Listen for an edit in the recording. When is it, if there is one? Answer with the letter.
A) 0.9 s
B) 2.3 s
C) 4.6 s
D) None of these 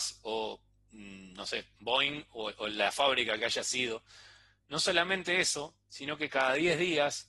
C